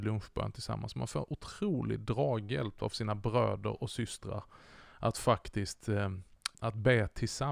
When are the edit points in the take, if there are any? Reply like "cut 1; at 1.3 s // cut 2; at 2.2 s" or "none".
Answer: cut 1; at 6.5 s